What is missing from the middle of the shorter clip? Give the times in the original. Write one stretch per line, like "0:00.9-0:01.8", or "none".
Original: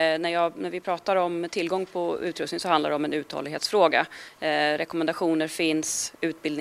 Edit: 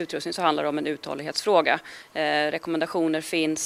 none

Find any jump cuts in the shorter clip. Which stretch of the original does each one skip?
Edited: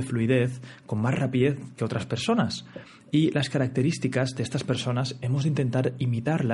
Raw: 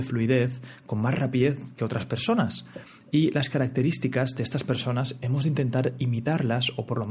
none

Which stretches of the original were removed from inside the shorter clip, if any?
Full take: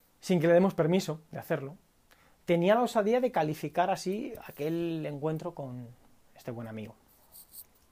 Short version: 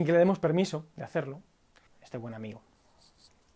0:02.2-0:06.2

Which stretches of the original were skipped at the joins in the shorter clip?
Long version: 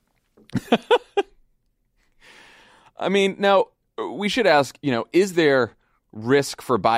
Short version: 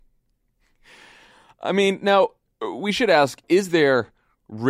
0:04.8-0:05.1

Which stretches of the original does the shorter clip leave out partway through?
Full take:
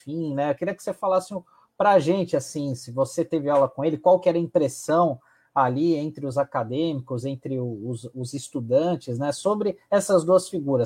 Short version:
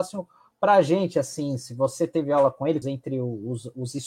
0:04.0-0:07.2

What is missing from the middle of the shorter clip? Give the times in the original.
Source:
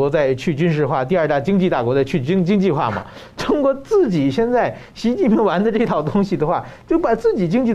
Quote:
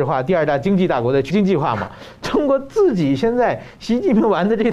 0:02.1-0:02.4

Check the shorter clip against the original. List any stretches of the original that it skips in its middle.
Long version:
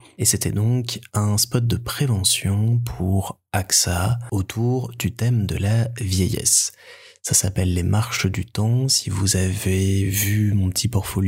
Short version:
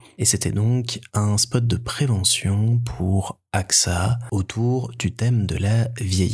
none

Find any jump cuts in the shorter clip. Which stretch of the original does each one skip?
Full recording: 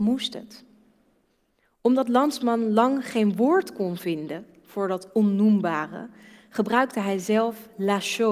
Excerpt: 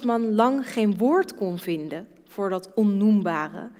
none

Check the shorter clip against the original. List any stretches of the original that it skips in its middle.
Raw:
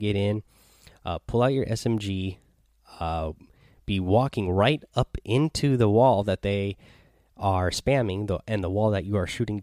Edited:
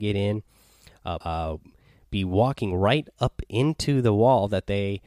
0:01.2-0:03.0

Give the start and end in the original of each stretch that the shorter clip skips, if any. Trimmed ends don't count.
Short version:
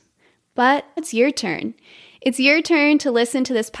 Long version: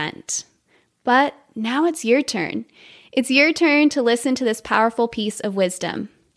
0:01.5-0:01.9

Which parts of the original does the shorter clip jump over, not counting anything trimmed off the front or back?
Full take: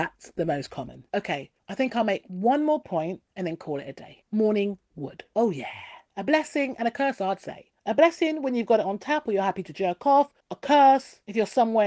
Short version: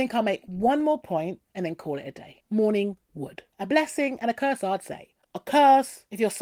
0:05.3-0:06.1
0:07.8-0:10.4

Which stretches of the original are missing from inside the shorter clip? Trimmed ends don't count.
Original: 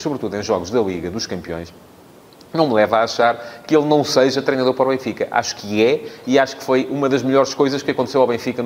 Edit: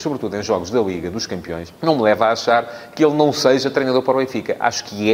0:01.8-0:02.5

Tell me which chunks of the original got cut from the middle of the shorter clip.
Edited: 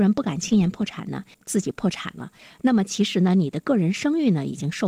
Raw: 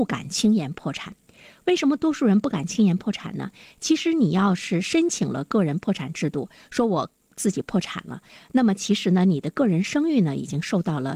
0:03.6-0:07.2

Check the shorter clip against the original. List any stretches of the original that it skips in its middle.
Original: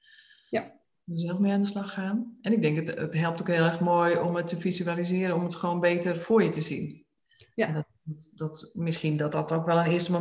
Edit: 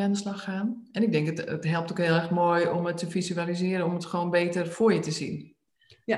none

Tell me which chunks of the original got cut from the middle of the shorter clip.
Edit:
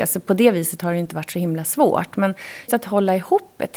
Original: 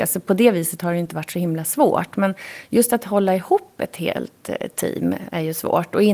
0:02.7-0:02.9

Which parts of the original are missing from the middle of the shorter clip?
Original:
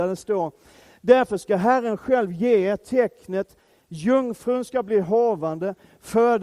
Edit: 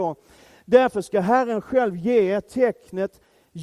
none

